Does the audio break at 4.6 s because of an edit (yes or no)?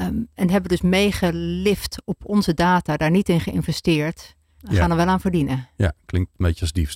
yes